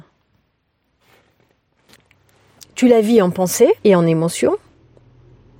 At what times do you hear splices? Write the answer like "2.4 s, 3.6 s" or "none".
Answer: 2.6 s, 3.8 s